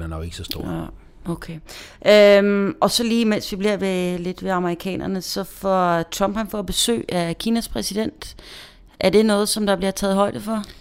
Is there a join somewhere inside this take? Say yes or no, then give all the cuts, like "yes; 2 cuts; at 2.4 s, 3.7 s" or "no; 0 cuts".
no; 0 cuts